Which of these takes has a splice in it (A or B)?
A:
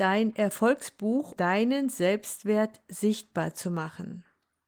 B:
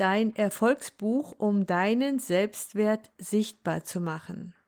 A